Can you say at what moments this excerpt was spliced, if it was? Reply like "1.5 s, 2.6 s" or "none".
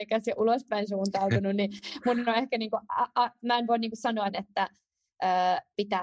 4.3 s